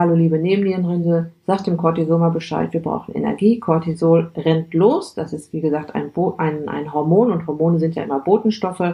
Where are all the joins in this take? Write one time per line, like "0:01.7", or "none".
none